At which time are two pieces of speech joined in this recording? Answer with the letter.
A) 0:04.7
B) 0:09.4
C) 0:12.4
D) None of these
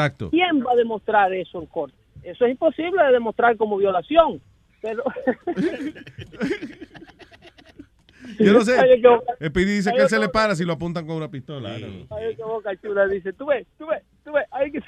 A